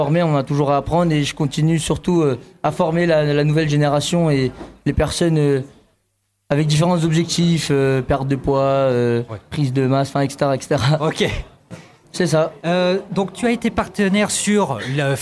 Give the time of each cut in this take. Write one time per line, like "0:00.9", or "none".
0:12.0